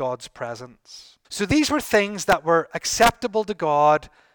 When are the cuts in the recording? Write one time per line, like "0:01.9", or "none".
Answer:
0:01.2